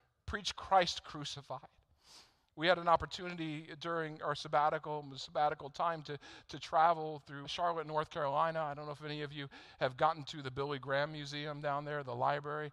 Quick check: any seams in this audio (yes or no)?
yes